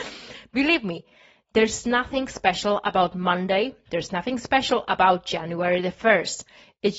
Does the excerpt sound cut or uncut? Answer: uncut